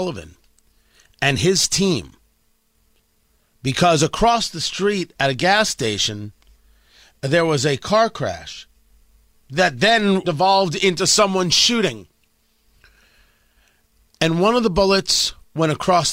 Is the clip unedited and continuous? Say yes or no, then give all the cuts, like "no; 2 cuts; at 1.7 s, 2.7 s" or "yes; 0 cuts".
no; 1 cut; at 10.2 s